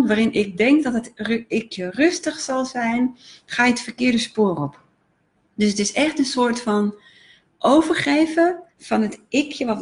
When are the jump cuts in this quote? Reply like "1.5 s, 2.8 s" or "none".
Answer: 8.7 s